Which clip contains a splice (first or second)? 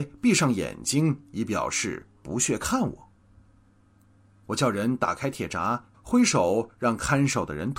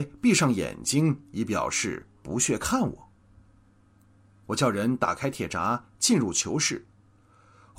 first